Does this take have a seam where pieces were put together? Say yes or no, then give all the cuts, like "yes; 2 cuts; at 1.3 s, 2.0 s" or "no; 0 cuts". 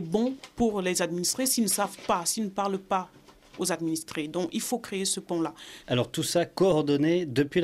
yes; 1 cut; at 5.8 s